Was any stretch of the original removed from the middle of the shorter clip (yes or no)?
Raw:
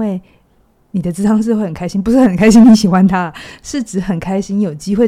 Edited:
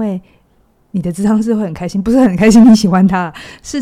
no